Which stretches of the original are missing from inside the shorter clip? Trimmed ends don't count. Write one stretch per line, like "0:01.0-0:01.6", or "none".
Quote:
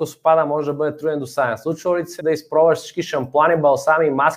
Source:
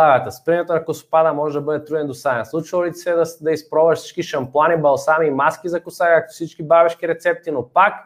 0:03.0-0:03.4